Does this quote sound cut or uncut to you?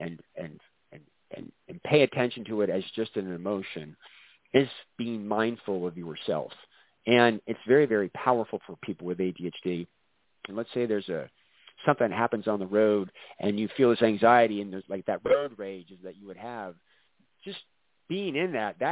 cut